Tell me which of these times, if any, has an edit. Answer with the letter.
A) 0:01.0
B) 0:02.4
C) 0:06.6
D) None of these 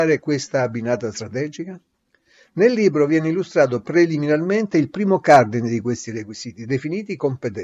D